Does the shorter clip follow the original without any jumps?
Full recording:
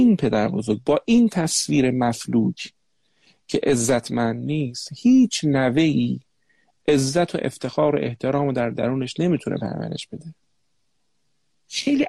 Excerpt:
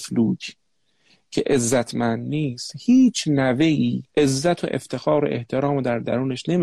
no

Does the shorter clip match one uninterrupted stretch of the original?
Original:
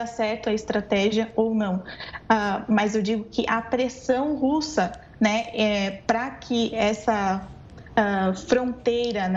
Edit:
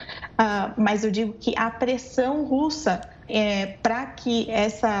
no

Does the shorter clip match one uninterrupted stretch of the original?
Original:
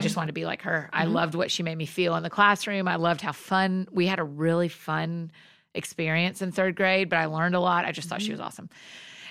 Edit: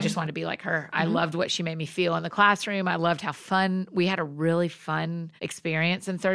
no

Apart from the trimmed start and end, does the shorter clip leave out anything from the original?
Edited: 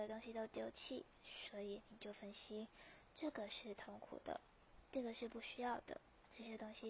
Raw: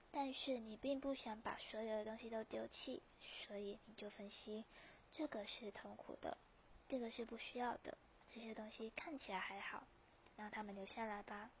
no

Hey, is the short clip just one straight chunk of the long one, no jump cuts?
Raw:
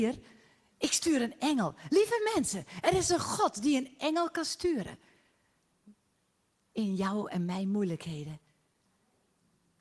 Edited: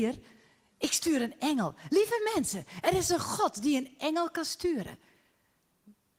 yes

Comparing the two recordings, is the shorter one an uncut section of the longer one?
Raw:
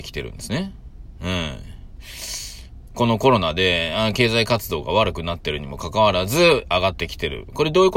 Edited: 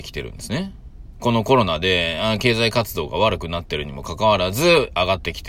no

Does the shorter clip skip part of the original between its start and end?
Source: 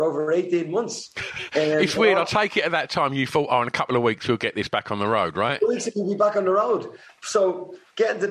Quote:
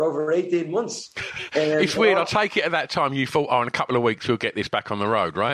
no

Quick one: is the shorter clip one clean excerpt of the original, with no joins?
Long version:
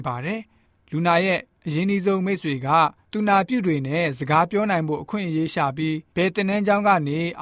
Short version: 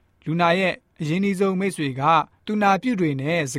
yes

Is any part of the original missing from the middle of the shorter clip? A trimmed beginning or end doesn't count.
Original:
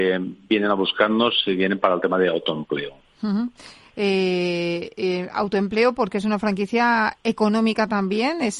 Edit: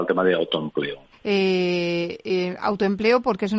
yes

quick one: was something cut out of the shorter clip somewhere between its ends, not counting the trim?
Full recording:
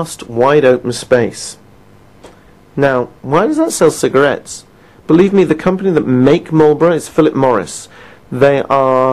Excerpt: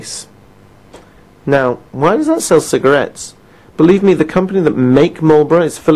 no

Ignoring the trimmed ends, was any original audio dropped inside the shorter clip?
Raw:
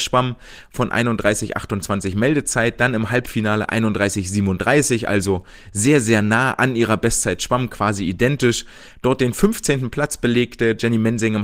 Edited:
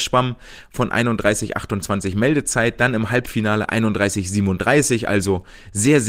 no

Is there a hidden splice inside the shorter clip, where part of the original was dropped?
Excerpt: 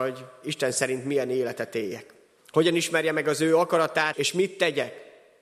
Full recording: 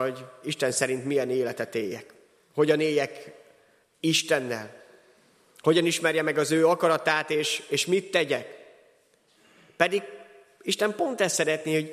yes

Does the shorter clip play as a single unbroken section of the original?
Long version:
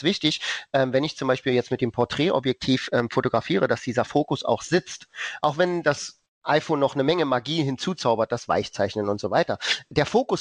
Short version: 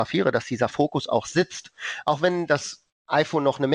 yes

